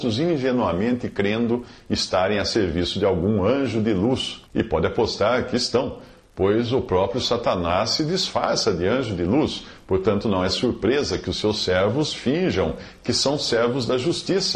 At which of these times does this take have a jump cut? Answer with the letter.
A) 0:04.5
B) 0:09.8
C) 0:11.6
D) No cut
A